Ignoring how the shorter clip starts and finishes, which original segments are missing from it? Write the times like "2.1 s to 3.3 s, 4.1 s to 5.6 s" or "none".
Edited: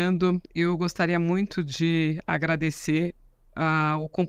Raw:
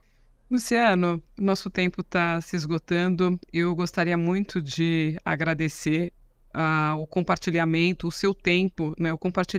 none